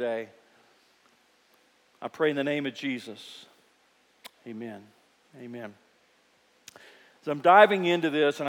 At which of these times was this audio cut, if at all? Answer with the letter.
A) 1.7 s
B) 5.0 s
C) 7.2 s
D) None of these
D